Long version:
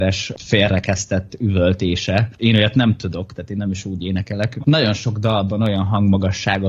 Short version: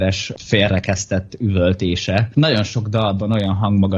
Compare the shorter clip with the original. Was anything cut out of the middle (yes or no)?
yes